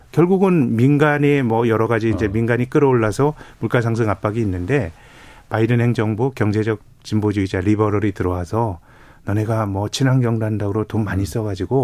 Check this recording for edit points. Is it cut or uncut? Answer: uncut